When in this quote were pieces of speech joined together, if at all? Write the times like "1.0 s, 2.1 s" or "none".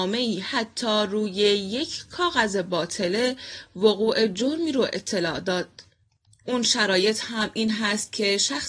6.4 s